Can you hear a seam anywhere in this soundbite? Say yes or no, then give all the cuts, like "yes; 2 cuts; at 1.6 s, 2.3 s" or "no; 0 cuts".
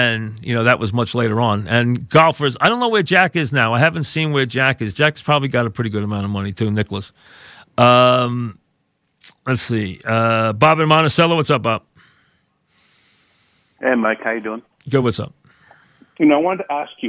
no; 0 cuts